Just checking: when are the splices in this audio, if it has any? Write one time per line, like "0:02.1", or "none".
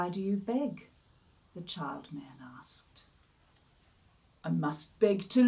none